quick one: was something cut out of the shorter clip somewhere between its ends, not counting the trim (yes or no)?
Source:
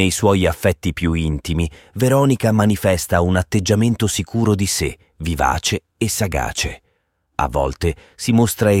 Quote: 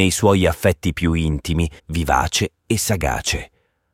yes